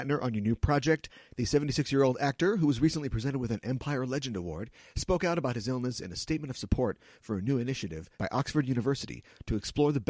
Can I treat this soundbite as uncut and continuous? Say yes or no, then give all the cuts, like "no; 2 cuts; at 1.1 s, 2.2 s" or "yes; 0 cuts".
no; 1 cut; at 1.3 s